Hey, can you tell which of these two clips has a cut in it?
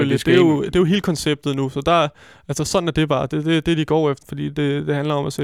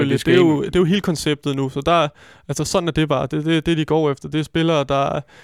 first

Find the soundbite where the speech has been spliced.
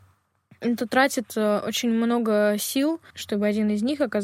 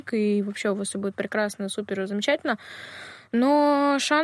first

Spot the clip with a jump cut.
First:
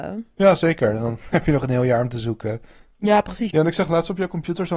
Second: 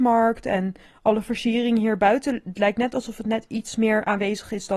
first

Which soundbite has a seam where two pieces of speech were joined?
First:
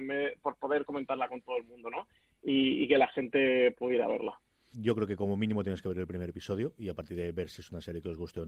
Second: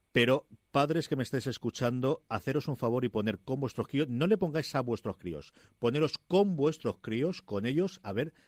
first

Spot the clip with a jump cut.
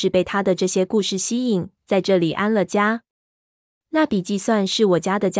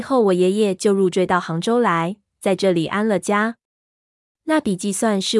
first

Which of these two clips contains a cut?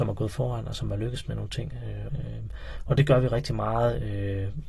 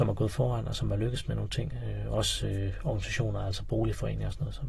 first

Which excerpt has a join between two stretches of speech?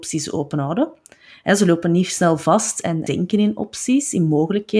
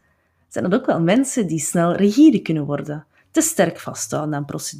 first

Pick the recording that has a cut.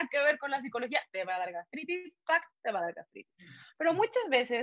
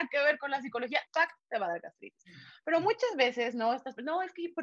second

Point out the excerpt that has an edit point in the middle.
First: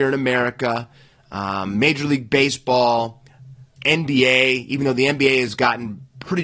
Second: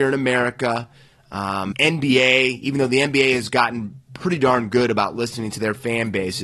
second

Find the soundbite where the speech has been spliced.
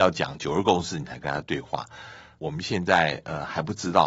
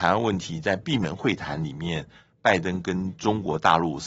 first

